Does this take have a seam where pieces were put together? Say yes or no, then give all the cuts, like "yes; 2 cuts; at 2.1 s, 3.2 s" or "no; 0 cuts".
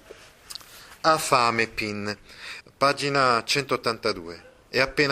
yes; 1 cut; at 2.6 s